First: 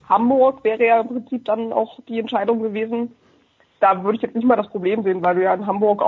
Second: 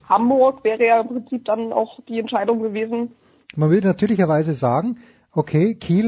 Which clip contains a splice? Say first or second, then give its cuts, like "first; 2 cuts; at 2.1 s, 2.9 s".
second; 1 cut; at 3.4 s